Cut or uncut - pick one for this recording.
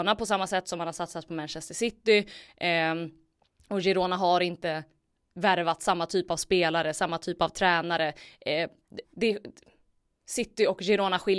cut